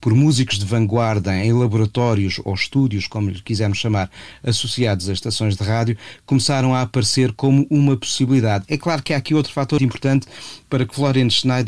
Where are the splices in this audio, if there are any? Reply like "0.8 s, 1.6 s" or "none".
9.8 s